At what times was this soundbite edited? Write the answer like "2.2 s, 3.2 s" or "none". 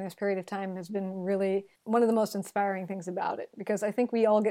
1.7 s